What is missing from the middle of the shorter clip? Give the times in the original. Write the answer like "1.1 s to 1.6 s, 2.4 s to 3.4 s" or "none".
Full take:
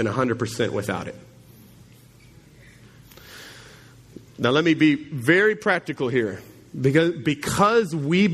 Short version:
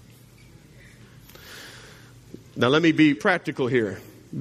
5.0 s to 5.6 s